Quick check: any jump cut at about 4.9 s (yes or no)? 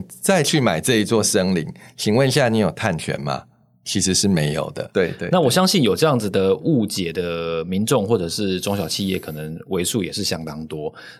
yes